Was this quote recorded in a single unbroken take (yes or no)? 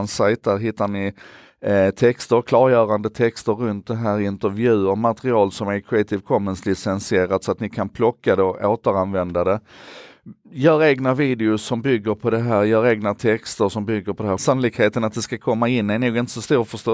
no